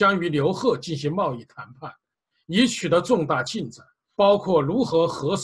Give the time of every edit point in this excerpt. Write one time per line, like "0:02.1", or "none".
0:04.2